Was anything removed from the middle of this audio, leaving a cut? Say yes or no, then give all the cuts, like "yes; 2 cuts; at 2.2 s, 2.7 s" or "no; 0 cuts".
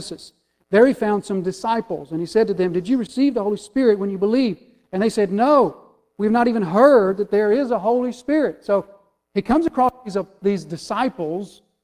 no; 0 cuts